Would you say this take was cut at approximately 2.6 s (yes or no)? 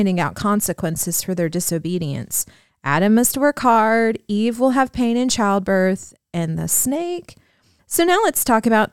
no